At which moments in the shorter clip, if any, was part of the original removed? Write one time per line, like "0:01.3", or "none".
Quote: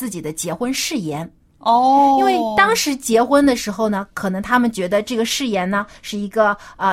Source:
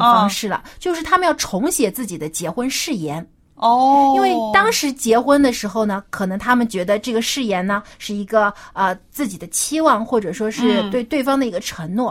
none